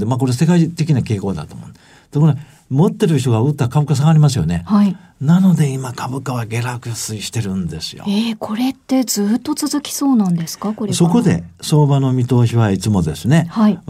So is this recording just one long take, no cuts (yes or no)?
yes